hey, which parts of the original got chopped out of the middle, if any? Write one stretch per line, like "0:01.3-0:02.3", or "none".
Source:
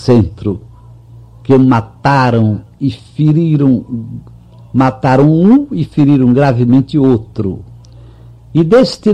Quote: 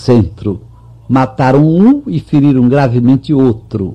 0:01.0-0:04.7